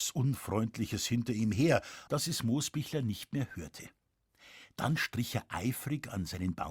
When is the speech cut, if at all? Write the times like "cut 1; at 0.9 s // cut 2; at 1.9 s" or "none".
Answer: cut 1; at 2.1 s